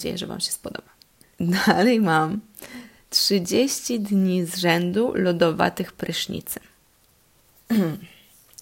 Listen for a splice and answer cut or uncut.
cut